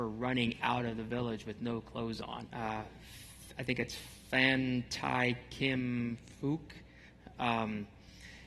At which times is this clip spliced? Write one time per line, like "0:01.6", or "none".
0:02.5